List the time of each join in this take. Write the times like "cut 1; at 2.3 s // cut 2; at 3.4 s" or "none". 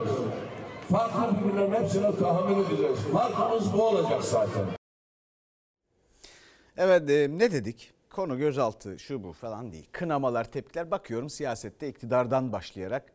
none